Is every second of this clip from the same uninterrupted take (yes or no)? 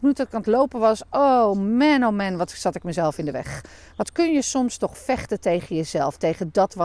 yes